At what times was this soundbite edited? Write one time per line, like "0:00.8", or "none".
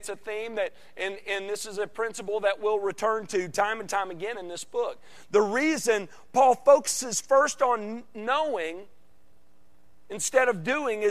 none

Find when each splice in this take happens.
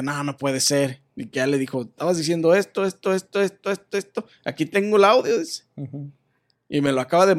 none

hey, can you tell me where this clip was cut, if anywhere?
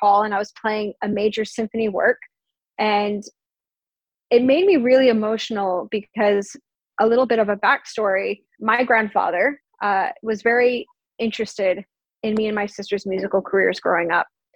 0:08.5

